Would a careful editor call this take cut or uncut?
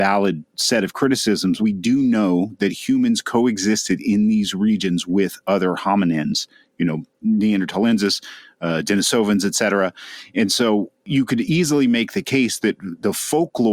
cut